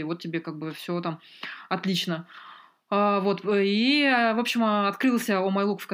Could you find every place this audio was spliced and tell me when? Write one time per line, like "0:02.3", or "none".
none